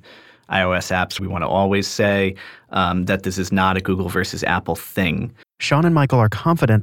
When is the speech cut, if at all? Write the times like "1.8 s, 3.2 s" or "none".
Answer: 1.2 s, 5.4 s